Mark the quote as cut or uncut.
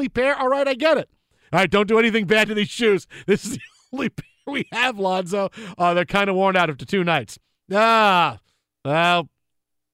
uncut